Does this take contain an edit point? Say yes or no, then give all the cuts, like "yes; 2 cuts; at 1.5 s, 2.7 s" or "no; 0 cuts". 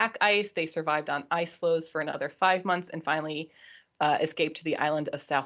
no; 0 cuts